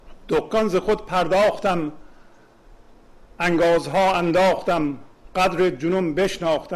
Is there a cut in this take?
no; 0 cuts

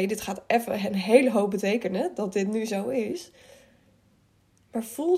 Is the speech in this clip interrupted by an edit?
no; 0 cuts

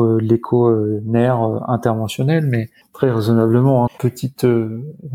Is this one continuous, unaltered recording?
no; 1 cut; at 3.9 s

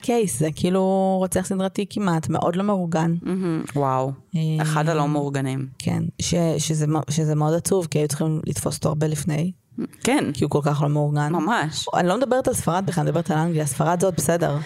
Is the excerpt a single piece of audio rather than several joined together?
yes; 0 cuts

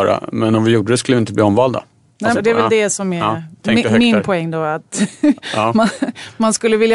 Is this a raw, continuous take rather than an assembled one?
no; 1 cut; at 2.3 s

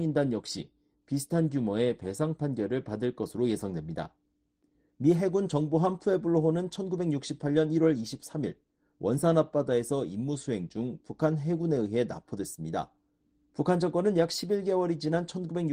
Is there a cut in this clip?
no; 0 cuts

